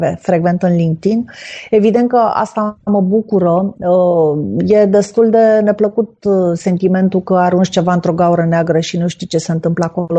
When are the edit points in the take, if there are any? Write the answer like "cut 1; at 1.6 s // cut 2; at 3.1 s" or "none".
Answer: none